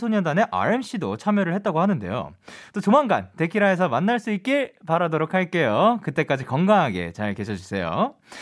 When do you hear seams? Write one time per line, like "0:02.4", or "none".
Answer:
0:02.7